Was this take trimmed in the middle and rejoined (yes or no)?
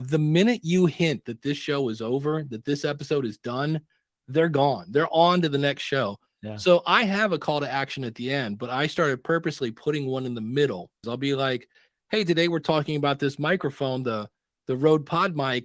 yes